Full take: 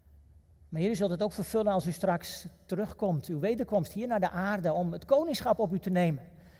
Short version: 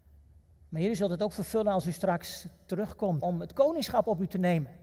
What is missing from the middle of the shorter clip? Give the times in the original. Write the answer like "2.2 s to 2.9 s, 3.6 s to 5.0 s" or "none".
3.2 s to 4.7 s